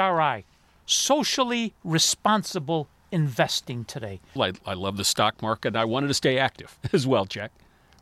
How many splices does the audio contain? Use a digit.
1